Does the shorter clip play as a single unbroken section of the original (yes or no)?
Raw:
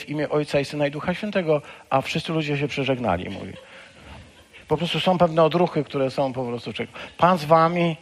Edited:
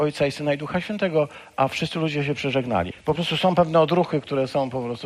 no